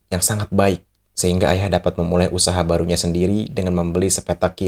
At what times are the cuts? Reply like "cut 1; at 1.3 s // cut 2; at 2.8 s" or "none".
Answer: none